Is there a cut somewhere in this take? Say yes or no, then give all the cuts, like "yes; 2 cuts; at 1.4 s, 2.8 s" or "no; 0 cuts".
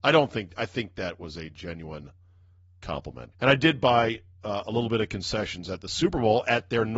yes; 1 cut; at 3.3 s